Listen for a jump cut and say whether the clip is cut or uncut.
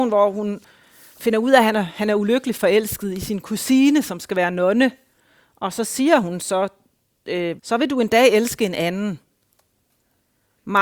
cut